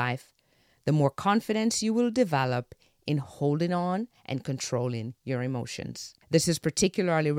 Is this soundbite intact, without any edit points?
no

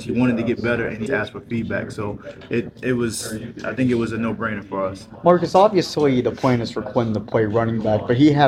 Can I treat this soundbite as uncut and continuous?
no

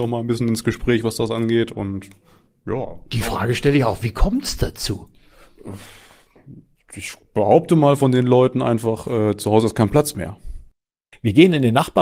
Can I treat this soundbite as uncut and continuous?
yes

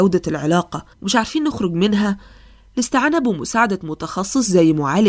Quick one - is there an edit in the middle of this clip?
yes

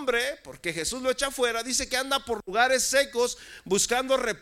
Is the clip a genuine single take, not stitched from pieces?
yes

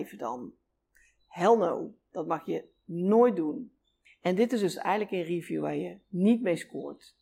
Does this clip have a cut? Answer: yes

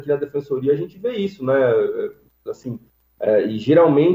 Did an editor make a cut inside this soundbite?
no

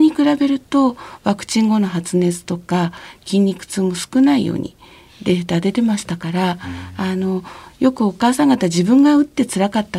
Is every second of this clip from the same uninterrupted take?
yes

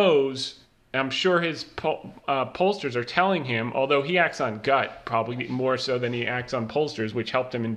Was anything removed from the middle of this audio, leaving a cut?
no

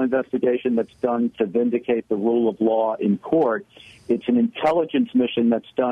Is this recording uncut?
yes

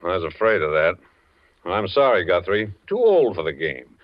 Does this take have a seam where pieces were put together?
yes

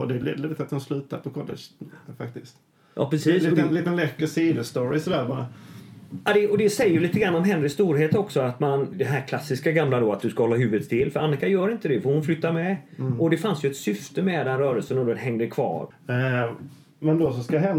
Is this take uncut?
no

